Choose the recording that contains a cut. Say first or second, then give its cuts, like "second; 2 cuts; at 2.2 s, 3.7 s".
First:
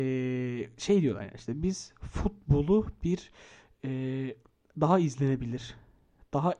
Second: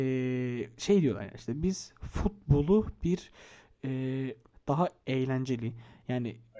second; 1 cut; at 4.5 s